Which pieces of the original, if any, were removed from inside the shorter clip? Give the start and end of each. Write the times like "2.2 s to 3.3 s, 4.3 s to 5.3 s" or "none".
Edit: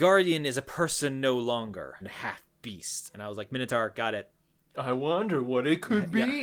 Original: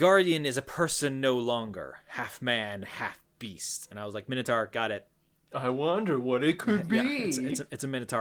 2.0 s to 2.8 s